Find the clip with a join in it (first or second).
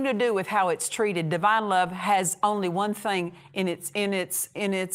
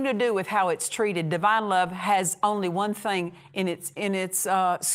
second